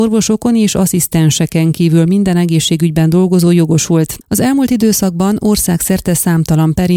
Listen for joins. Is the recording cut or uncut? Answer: cut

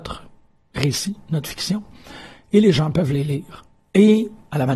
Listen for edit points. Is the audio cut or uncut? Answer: uncut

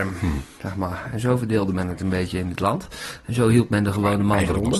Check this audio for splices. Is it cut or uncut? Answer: uncut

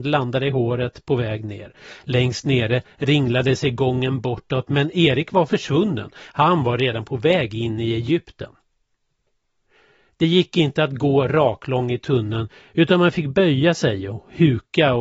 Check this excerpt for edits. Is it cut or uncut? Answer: uncut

